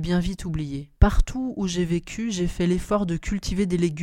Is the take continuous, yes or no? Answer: no